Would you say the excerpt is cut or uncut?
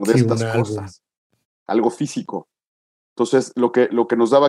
uncut